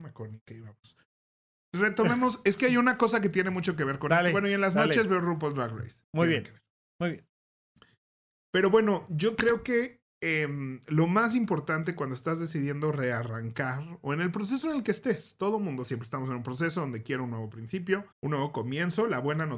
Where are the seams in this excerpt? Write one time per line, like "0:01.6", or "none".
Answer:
0:06.0
0:18.1